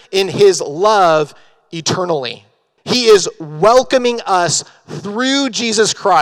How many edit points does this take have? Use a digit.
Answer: 1